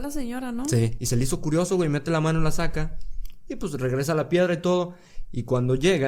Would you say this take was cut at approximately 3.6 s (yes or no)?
no